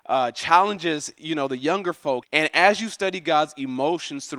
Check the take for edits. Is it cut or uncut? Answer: cut